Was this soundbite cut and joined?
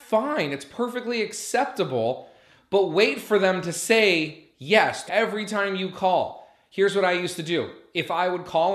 yes; 1 cut; at 5.1 s

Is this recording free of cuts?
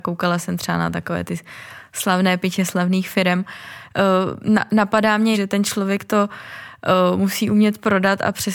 no; 1 cut; at 5.3 s

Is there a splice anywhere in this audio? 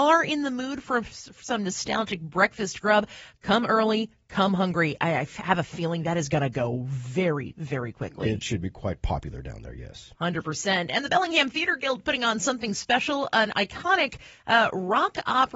no; 0 cuts

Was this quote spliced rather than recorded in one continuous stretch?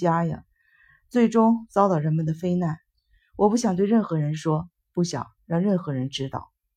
no; 0 cuts

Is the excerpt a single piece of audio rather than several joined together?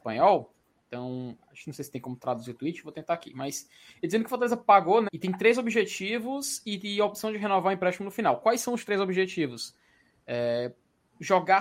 no; 1 cut; at 5.1 s

